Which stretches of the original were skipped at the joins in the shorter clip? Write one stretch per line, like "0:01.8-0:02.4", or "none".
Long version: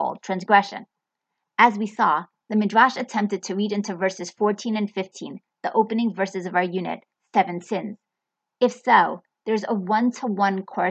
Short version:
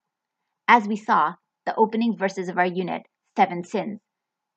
0:02.4-0:05.5

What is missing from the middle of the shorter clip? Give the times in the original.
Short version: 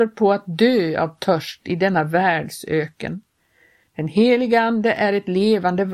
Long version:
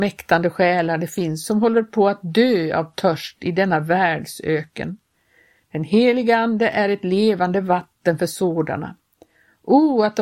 none

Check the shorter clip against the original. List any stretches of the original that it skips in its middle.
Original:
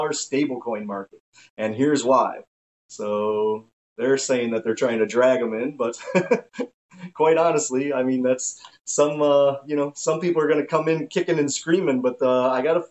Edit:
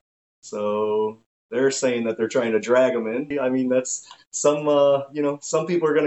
0:05.8-0:07.8

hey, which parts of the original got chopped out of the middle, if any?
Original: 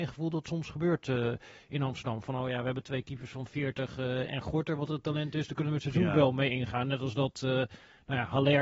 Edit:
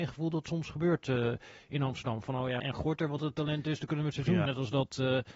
0:02.6-0:04.3
0:06.1-0:06.9

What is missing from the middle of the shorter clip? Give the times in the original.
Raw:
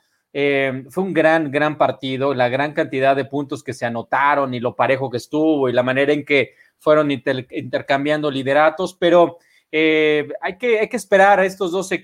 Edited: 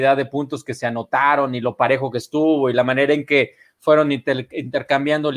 none

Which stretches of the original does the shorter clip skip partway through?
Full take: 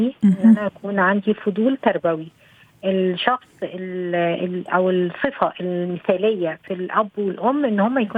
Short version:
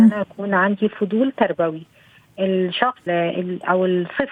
0:03.5-0:04.1

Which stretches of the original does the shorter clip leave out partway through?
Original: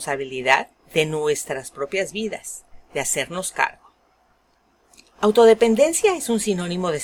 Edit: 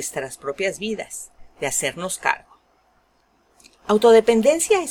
none

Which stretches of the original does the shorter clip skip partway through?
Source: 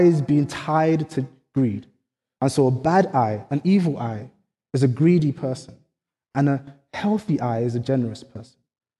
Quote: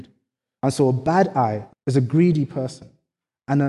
0:03.5-0:04.6

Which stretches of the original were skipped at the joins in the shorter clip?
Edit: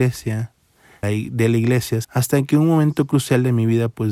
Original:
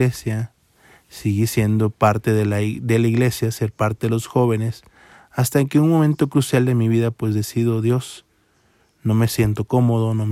0:01.0-0:02.5
0:03.5-0:05.3

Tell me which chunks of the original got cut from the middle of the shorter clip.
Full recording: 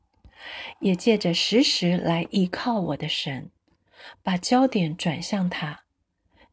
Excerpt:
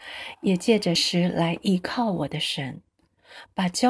0:01.3-0:01.6

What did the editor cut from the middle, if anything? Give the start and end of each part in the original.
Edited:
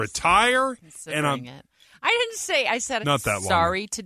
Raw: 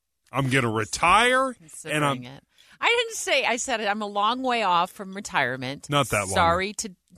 0:03.8-0:05.9

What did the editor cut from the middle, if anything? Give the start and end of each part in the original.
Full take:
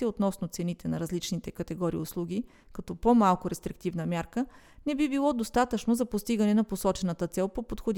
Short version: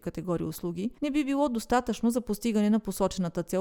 0:02.5-0:04.8

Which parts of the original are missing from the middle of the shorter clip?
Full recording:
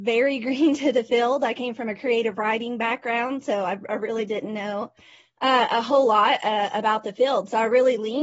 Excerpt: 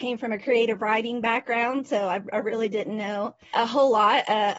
0:05.1-0:05.7

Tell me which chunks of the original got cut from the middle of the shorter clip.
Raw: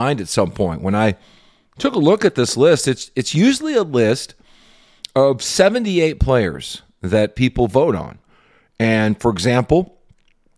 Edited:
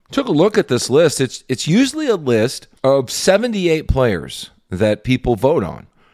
0:04.4-0:05.1

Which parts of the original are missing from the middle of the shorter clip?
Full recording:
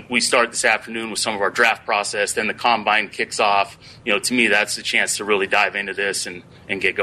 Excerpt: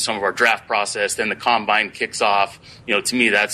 none

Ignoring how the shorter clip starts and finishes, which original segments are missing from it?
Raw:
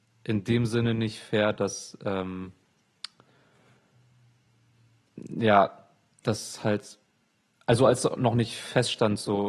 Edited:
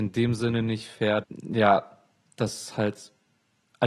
0:01.5-0:05.1

